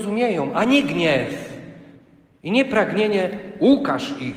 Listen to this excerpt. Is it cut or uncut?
uncut